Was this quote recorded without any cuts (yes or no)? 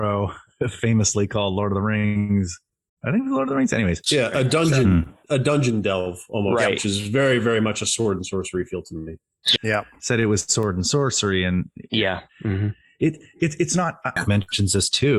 no